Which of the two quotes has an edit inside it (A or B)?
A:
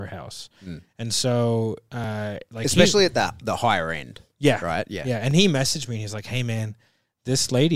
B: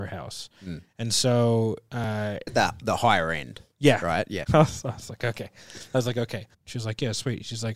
B